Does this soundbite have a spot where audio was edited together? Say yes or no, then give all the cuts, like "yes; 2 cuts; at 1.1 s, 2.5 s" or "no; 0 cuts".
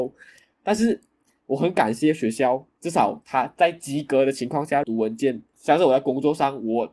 yes; 1 cut; at 4.8 s